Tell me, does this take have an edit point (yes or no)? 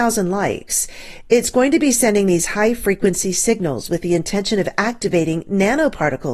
no